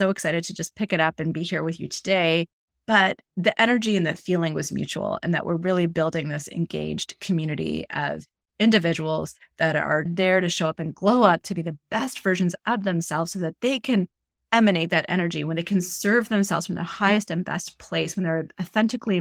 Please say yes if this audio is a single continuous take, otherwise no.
yes